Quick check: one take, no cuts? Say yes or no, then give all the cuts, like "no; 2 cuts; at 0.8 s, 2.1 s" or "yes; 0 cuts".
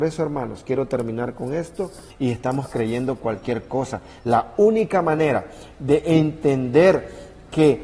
no; 1 cut; at 2.1 s